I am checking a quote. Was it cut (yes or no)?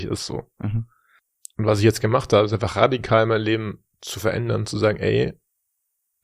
no